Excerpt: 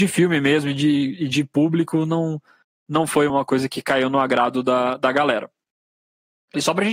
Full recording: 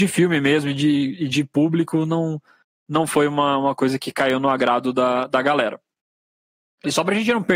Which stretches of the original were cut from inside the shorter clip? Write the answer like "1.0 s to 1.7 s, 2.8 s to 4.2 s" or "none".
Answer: 3.3 s to 3.6 s